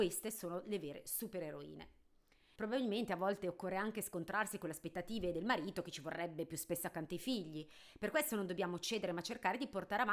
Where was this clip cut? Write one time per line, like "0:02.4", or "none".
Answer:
0:02.6